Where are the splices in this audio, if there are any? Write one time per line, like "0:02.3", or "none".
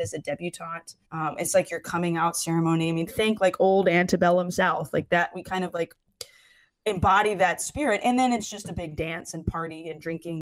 0:01.0